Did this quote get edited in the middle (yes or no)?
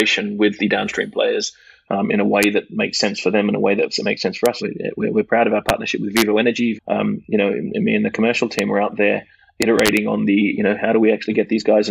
yes